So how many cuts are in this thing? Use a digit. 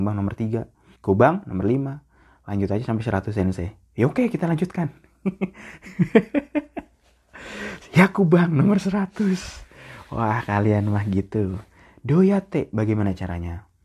1